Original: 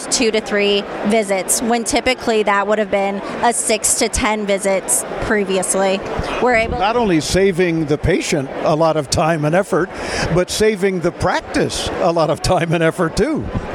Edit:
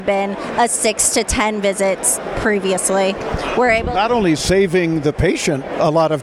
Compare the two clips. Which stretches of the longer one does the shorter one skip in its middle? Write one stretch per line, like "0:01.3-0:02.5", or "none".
none